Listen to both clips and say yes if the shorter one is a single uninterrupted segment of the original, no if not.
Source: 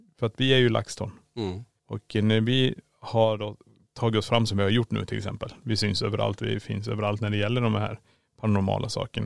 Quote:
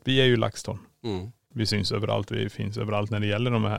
no